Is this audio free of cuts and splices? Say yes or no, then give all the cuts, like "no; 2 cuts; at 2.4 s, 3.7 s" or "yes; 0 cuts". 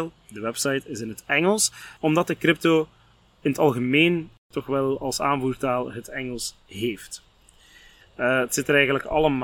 no; 1 cut; at 8.0 s